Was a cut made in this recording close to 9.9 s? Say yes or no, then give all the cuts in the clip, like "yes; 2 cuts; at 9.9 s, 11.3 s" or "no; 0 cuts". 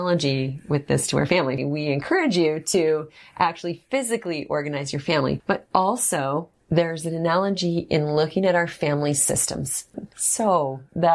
yes; 2 cuts; at 1.6 s, 9.9 s